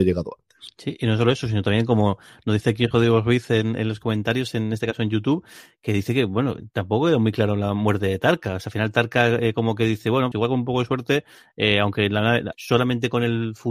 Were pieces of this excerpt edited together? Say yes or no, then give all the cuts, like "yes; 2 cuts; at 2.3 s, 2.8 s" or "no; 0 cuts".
yes; 2 cuts; at 10.3 s, 12.5 s